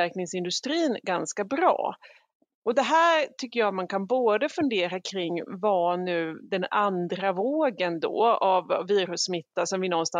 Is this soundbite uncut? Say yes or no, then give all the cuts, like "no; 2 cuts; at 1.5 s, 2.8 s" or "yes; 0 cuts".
yes; 0 cuts